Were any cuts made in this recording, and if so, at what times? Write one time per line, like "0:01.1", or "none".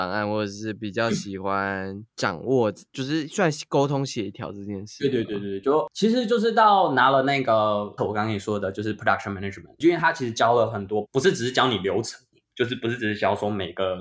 0:08.0
0:11.0